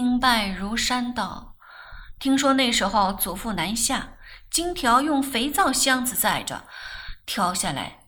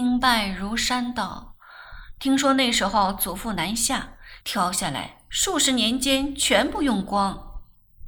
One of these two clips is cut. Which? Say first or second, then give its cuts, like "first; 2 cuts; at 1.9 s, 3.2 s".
second; 1 cut; at 4.4 s